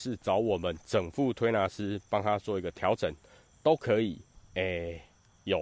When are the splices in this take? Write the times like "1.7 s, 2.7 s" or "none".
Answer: 4.3 s

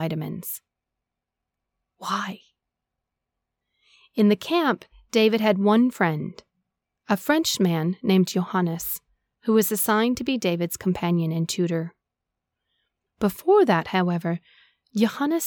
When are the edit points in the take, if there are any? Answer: 13.1 s

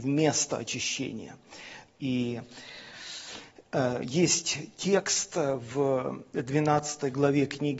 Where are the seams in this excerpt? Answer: 1.9 s

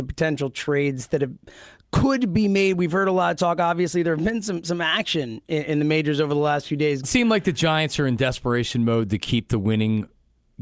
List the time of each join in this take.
7.0 s

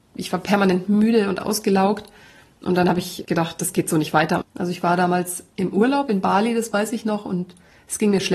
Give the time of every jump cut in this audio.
3.2 s, 4.4 s

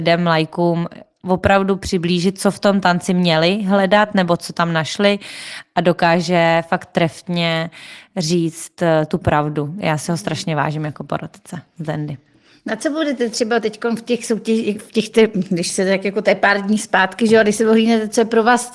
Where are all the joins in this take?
none

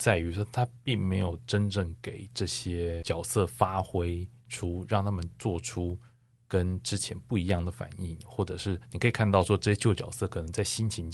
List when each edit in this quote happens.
none

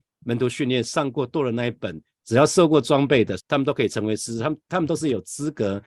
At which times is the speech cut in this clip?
2.2 s, 3.4 s

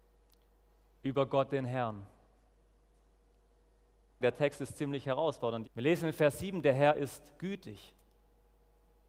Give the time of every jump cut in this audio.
4.2 s, 5.6 s, 7.4 s

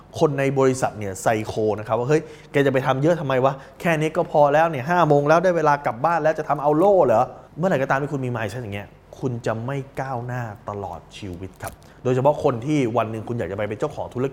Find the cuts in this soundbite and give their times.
7.5 s

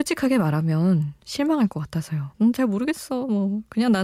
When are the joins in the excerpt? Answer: 2.3 s

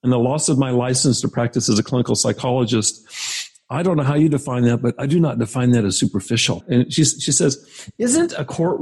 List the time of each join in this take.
6.6 s

